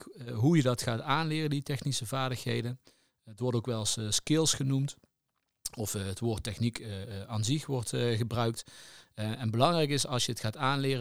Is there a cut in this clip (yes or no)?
no